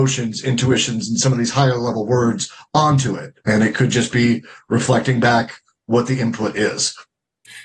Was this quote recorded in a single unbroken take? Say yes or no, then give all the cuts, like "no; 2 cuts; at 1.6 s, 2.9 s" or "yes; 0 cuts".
yes; 0 cuts